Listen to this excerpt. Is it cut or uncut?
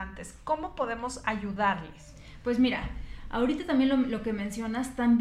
uncut